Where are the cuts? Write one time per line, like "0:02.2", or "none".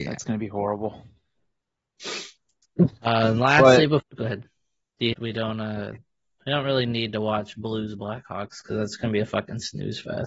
0:04.0
0:05.1